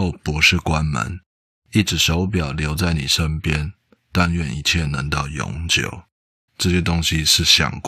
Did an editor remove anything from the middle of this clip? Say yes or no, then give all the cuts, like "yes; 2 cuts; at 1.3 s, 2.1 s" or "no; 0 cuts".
yes; 1 cut; at 6.5 s